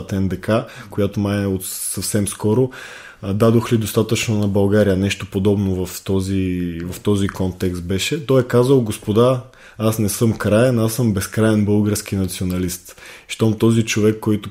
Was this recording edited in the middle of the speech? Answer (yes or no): no